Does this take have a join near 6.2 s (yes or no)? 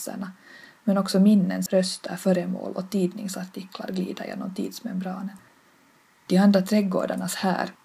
no